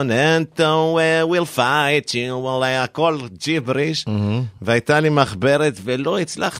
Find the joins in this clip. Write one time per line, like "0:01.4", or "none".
none